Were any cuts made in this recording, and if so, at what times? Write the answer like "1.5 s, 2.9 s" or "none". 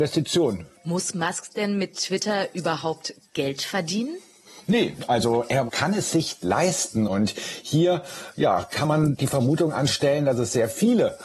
7.1 s

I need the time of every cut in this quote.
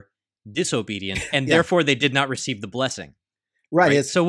1.3 s

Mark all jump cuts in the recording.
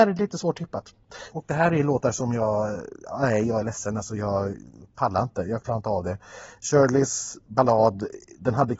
1.3 s

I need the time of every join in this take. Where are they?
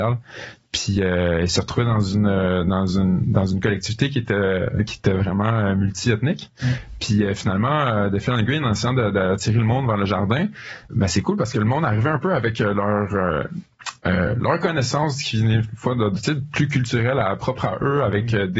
10.9 s

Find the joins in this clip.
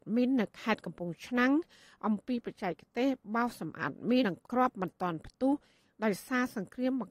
4.2 s

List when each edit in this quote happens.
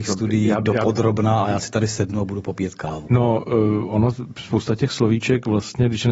3.1 s

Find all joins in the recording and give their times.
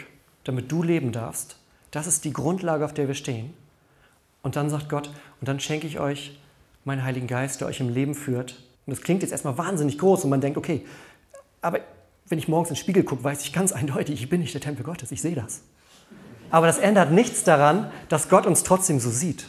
8.7 s, 16.5 s

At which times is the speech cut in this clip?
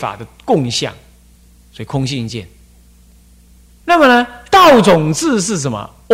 3.8 s

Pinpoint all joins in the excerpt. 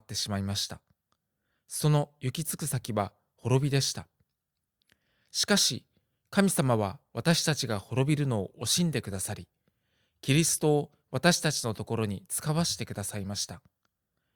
none

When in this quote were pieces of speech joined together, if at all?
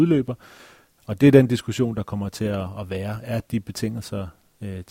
1.0 s

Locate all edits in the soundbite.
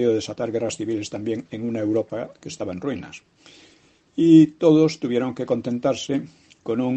none

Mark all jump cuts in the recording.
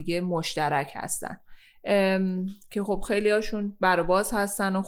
none

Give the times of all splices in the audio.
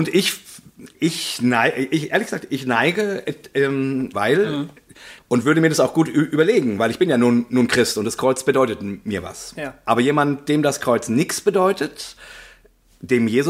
4.1 s, 5.2 s

